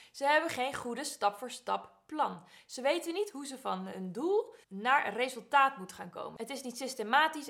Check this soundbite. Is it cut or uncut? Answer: cut